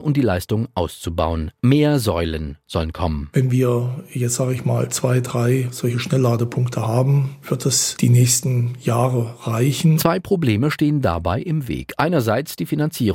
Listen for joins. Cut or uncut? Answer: cut